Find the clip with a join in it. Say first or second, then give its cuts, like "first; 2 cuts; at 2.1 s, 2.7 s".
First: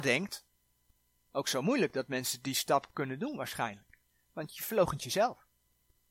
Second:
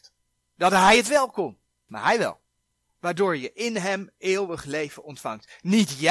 second; 1 cut; at 1.9 s